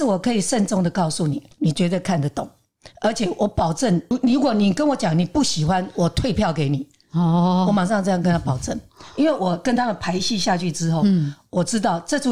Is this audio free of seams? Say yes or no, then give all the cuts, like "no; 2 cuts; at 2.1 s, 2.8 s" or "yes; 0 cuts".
no; 1 cut; at 1.5 s